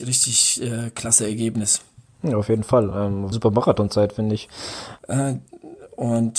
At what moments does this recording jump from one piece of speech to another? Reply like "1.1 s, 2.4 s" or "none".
3.3 s, 5.0 s